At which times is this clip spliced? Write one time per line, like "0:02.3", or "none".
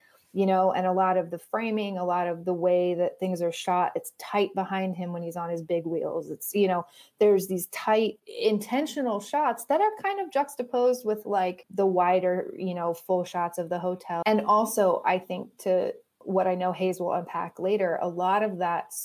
0:14.2